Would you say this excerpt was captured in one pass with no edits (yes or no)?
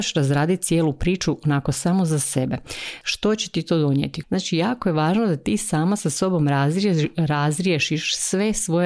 no